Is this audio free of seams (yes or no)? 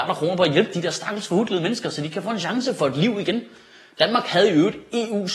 yes